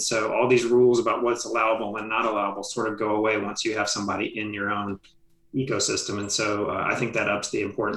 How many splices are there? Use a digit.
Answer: 0